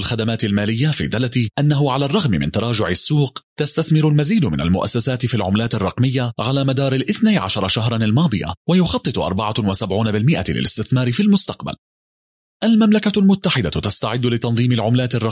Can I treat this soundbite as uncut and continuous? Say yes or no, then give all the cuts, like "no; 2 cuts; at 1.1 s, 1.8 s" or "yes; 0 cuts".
yes; 0 cuts